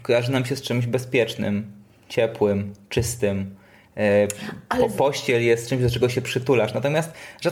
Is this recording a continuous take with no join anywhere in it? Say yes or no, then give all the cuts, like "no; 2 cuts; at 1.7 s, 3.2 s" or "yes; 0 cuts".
yes; 0 cuts